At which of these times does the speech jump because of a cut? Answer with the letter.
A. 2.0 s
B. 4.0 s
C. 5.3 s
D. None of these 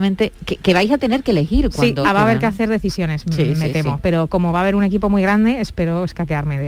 A